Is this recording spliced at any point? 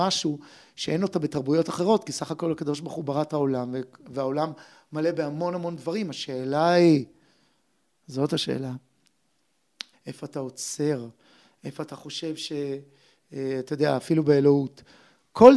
yes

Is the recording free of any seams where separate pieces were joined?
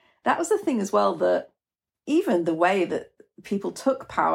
yes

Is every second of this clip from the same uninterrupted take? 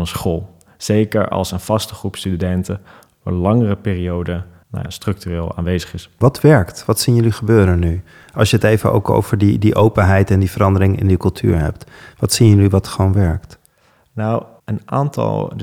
yes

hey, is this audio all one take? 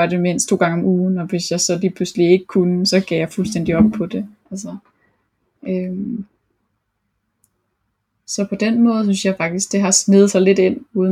yes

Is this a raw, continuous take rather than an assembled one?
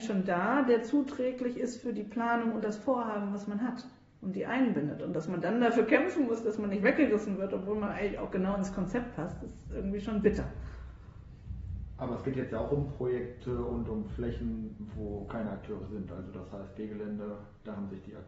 yes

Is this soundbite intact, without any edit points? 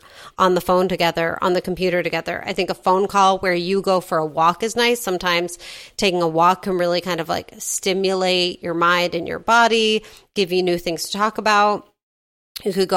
yes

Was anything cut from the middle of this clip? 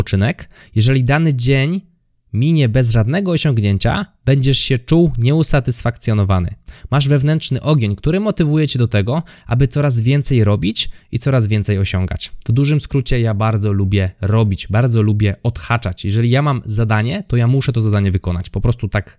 no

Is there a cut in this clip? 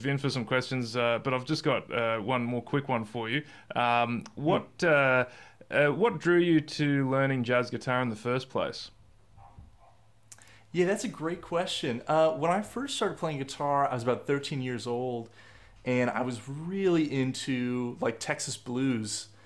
no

